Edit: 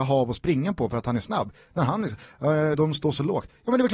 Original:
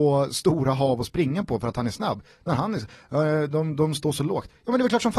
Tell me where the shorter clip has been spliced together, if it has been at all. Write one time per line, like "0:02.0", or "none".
0:02.7